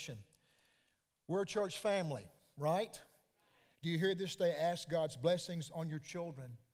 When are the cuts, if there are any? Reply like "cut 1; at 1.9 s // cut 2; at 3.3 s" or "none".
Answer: cut 1; at 3.7 s